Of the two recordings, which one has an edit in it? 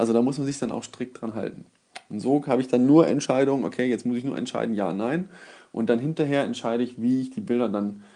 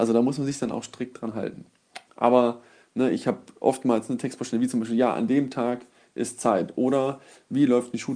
second; 1 cut; at 2.1 s

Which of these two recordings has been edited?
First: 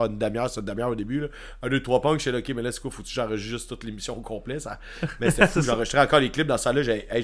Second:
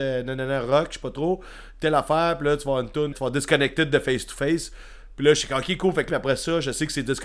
second; 2 cuts; at 3.1 s, 6.1 s

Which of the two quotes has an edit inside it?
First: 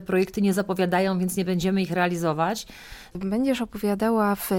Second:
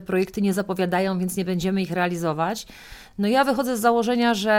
first; 1 cut; at 3.1 s

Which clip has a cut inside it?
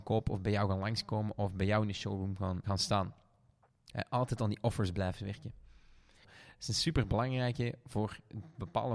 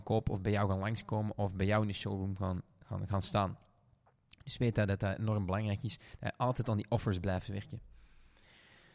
first; 3 cuts; at 2.6 s, 3.9 s, 6.2 s

